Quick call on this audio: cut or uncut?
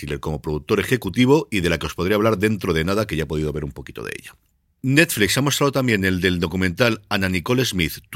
uncut